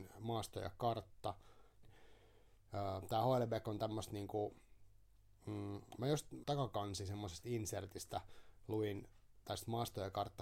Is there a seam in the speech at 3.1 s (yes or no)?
no